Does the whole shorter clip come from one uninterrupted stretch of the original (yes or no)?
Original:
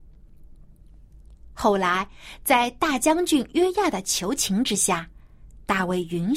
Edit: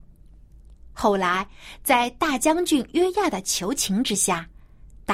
yes